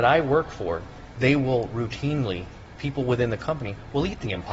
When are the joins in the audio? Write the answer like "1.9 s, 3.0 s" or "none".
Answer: none